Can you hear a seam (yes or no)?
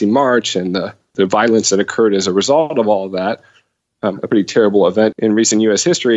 yes